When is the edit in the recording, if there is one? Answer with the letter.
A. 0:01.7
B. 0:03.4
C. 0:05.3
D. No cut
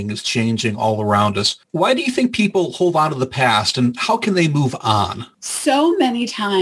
C